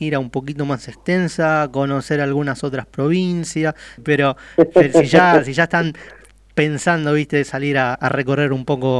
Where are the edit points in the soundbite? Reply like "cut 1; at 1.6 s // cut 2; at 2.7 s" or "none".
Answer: cut 1; at 4.0 s // cut 2; at 7.9 s